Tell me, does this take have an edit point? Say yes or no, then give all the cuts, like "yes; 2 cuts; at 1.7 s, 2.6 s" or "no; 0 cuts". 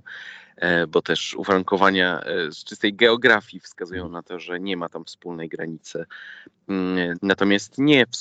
yes; 1 cut; at 7.1 s